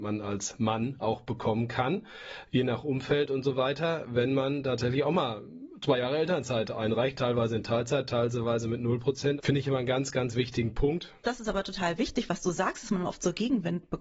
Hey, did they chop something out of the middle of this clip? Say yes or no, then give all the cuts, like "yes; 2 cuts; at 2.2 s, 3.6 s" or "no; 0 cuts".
yes; 2 cuts; at 9.4 s, 11.2 s